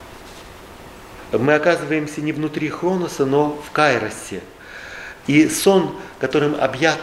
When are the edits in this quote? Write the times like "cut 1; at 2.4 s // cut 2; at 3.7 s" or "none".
cut 1; at 1.3 s // cut 2; at 5.2 s